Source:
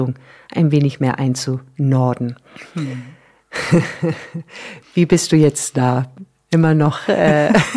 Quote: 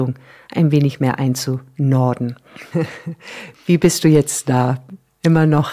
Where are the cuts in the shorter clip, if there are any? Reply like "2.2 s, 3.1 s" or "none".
2.7 s

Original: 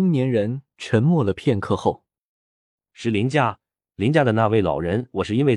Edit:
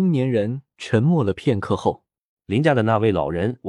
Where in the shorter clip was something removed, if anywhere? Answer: 2.4 s

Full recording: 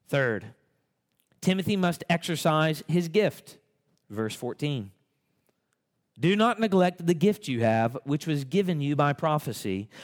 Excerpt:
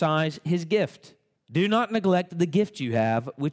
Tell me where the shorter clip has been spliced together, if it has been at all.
1.4 s

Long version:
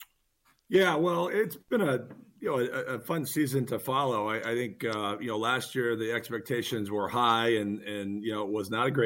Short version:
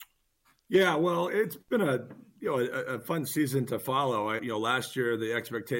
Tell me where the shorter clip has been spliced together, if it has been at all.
4.4 s

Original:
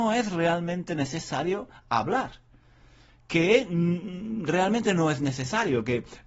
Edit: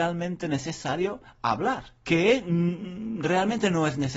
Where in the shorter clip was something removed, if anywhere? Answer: 2.0 s

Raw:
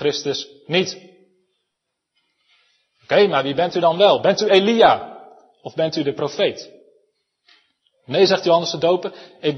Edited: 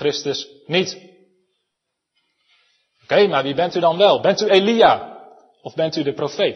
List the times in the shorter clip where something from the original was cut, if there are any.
none

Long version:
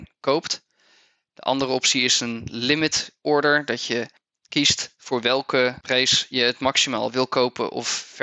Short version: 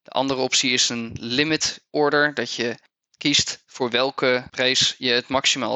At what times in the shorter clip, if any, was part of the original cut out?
none

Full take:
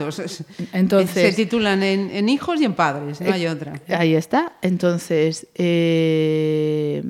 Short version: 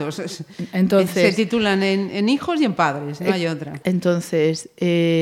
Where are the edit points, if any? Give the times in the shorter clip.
3.8 s

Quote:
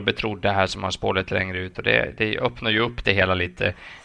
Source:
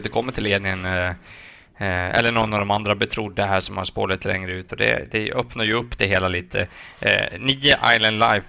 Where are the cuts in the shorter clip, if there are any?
none

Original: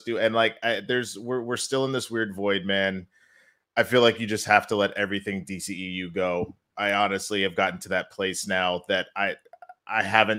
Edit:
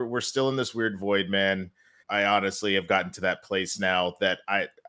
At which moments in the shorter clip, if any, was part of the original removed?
2.0 s

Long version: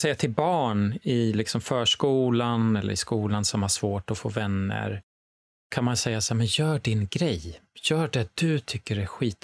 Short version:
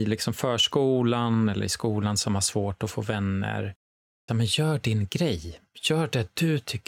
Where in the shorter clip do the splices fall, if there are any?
4.3 s

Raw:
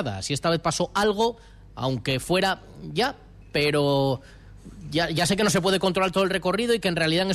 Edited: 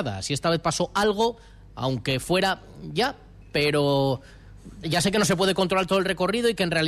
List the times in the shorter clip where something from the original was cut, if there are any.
4.8 s

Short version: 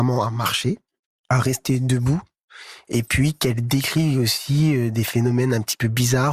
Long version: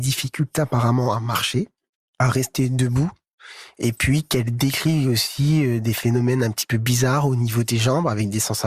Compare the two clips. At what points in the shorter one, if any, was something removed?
none

